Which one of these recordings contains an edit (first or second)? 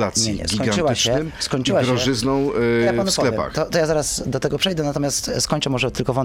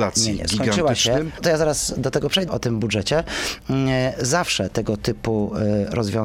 second